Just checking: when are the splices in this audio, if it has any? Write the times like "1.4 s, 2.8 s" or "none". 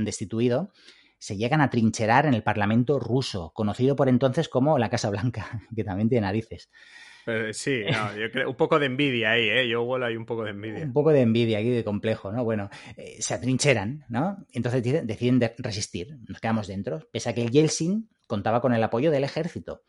none